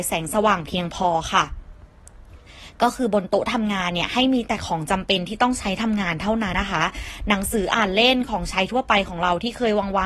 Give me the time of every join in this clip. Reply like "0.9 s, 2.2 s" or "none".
6.5 s